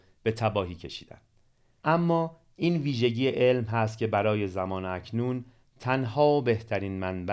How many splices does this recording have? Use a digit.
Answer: 1